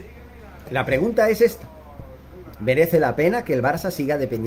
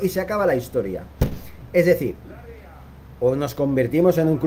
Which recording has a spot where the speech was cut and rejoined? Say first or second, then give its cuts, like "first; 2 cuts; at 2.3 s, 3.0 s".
second; 1 cut; at 1.7 s